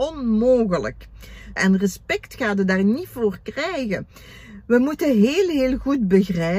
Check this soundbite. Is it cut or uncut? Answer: cut